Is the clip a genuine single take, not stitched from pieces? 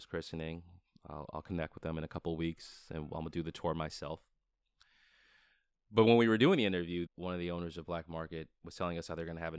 no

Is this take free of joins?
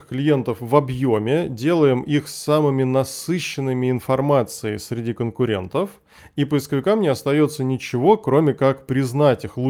yes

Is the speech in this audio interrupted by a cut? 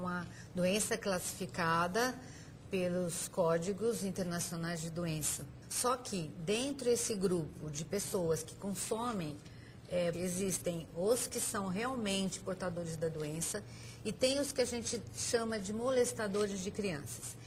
yes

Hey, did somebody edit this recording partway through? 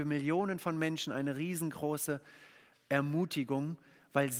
no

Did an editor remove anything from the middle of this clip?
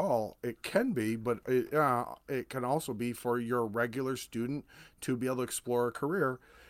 no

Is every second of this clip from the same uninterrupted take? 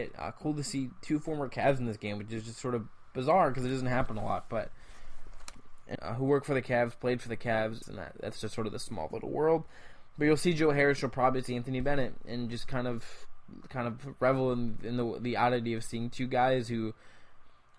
no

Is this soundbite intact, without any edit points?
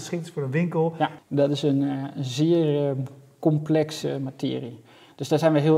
no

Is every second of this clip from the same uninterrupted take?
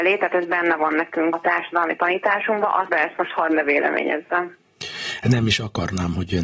no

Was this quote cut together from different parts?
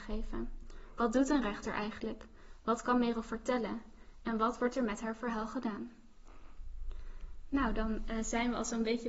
no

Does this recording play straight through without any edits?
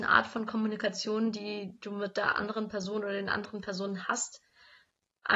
yes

